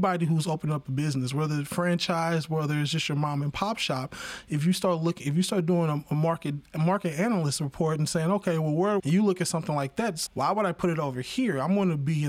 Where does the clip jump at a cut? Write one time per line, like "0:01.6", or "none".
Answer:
0:09.0
0:10.3